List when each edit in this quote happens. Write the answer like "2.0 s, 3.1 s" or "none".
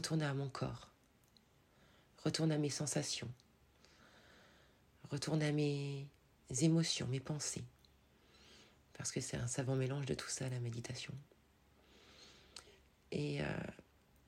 none